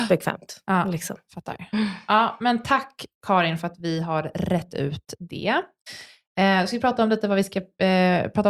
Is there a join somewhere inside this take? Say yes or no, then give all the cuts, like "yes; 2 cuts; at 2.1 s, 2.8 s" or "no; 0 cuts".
no; 0 cuts